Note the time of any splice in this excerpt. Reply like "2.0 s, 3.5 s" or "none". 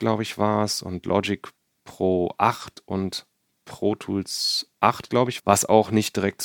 5.4 s